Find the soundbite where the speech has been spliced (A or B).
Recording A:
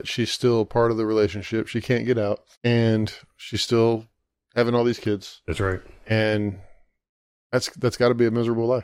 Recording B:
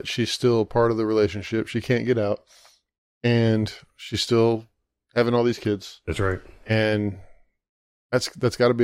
A